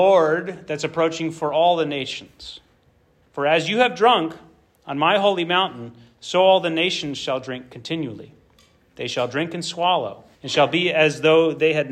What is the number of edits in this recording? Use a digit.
2